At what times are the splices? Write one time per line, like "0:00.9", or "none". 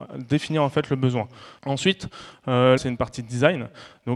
0:01.6
0:02.8